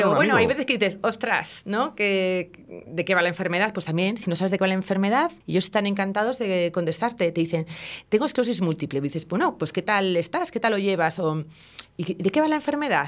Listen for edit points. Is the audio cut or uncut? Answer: cut